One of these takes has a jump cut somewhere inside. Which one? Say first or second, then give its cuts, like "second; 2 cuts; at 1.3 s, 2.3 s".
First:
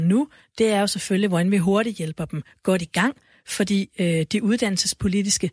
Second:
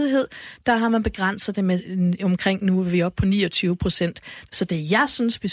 second; 1 cut; at 4.5 s